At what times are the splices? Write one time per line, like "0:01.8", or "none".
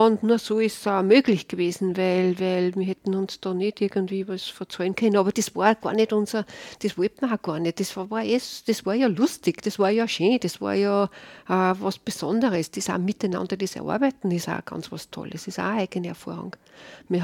none